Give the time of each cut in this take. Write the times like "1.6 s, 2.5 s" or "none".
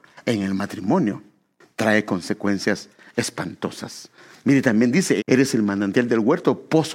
5.2 s